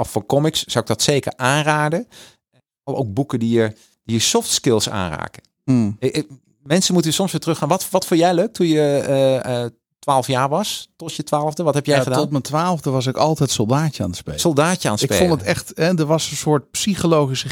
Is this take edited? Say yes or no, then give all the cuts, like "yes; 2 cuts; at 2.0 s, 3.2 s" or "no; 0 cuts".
no; 0 cuts